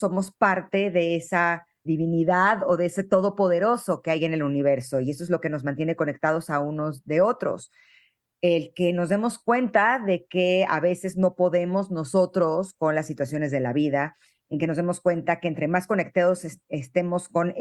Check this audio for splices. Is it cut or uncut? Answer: cut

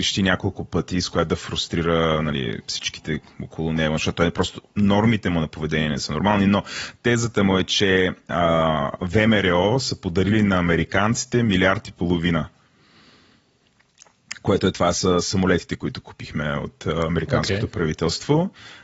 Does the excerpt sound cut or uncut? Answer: uncut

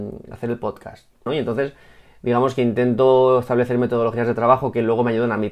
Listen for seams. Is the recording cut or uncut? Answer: cut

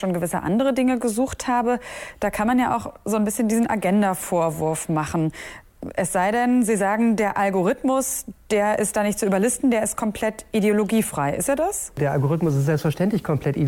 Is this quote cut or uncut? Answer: uncut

